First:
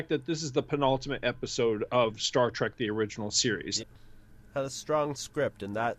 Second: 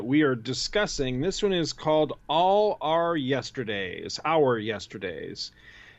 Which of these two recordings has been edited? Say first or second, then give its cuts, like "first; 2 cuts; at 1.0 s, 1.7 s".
first; 1 cut; at 3.8 s